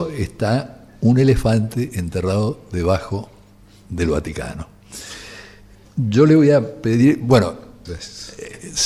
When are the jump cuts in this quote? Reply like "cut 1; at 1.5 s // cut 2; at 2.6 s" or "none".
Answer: cut 1; at 7.9 s